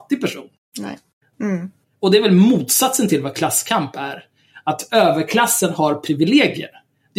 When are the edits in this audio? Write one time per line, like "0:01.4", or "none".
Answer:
0:01.3